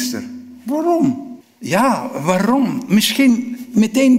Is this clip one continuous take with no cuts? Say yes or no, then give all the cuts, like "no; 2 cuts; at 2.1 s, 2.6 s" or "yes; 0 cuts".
no; 1 cut; at 1.4 s